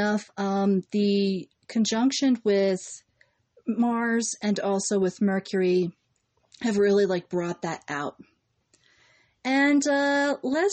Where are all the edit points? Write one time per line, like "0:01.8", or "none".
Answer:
none